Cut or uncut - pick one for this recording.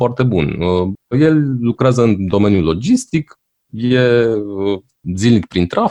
cut